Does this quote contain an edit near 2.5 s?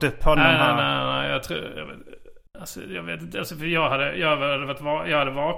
yes; 1 cut; at 2.5 s

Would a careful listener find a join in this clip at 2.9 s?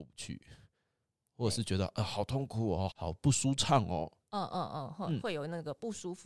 yes; 1 cut; at 2.9 s

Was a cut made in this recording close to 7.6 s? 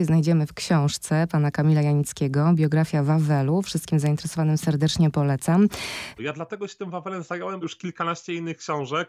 yes; 2 cuts; at 6.2 s, 7.6 s

